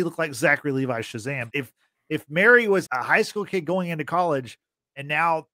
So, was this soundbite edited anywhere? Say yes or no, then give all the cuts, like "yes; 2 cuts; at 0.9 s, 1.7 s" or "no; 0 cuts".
yes; 2 cuts; at 1.5 s, 2.8 s